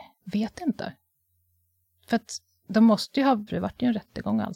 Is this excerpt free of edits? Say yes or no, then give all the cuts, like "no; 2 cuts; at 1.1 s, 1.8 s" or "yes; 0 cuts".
no; 1 cut; at 3.5 s